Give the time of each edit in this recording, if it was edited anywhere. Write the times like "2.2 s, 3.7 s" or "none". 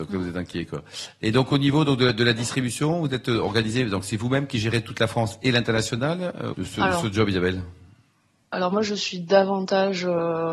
6.5 s